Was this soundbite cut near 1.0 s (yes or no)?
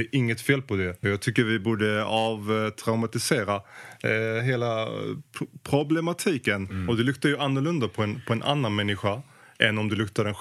yes